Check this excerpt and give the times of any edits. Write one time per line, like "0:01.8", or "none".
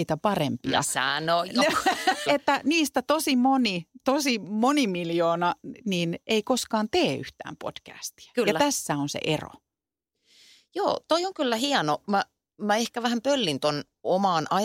0:02.3